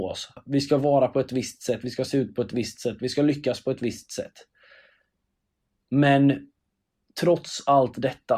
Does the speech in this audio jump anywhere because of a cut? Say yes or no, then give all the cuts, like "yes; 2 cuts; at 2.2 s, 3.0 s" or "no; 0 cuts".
no; 0 cuts